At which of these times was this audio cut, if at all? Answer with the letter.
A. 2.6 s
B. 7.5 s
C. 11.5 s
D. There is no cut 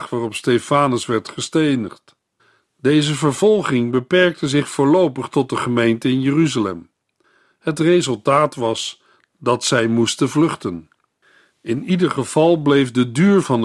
D